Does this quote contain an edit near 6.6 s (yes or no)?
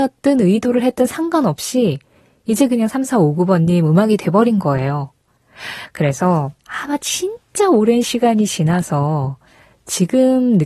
yes